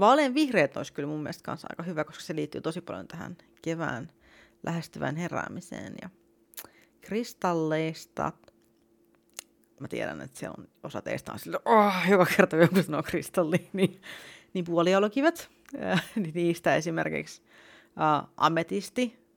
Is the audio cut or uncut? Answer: cut